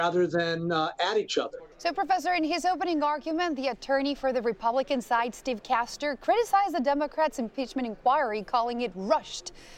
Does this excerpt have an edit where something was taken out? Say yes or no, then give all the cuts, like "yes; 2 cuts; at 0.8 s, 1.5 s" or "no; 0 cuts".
yes; 1 cut; at 1.7 s